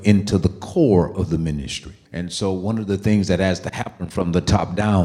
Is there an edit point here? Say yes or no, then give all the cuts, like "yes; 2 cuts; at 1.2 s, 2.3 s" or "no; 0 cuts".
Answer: yes; 1 cut; at 2.0 s